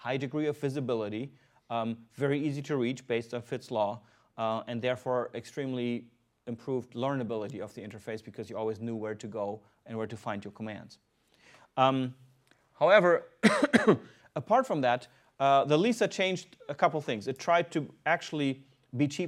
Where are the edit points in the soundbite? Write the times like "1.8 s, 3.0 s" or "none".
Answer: none